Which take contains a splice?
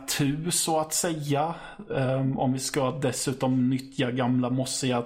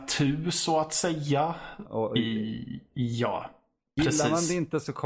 second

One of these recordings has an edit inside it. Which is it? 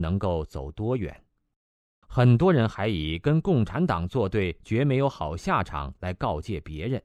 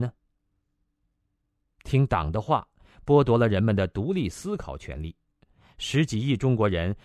first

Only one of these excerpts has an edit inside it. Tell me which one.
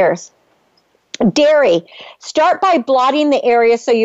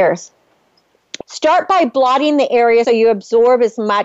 second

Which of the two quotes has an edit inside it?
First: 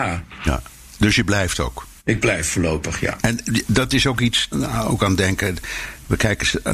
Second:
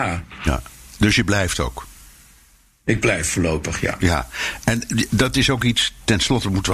first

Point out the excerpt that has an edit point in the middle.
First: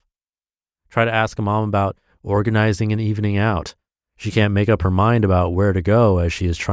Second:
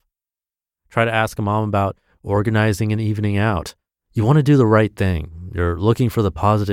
second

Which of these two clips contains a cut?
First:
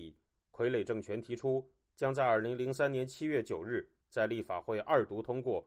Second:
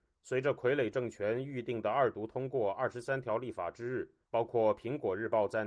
second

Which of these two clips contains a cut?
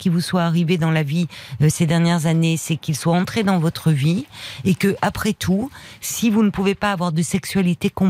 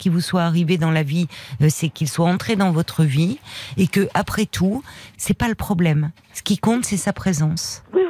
second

